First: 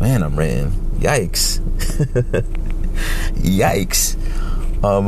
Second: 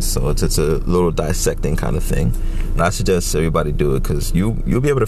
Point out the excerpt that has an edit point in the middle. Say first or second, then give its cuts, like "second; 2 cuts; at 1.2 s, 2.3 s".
second; 1 cut; at 2.8 s